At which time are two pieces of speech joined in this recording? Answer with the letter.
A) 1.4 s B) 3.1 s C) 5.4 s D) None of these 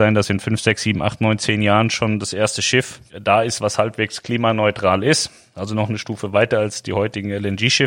B